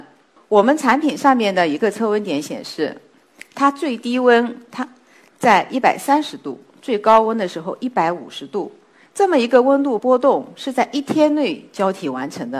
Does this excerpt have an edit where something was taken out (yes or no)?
yes